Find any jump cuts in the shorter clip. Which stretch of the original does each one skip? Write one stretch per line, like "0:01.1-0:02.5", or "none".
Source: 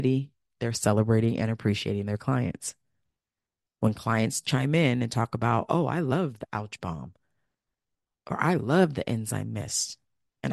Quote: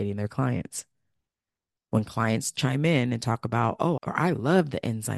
0:05.9-0:08.2